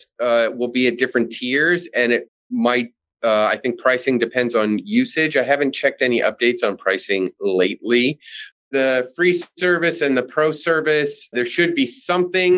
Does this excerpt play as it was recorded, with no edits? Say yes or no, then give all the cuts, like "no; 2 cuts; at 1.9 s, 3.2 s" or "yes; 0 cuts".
no; 2 cuts; at 8.7 s, 11.3 s